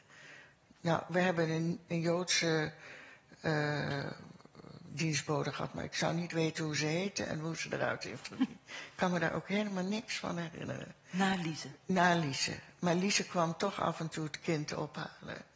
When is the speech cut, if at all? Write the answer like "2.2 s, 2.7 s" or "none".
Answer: none